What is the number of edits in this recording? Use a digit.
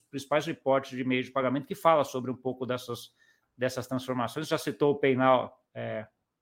0